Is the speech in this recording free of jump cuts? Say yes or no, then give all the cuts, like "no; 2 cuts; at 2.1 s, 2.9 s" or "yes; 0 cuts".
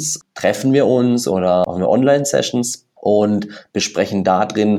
no; 1 cut; at 3.0 s